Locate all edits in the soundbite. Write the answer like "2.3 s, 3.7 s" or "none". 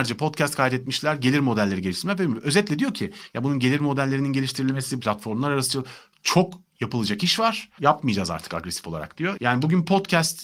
5.0 s, 7.8 s, 9.4 s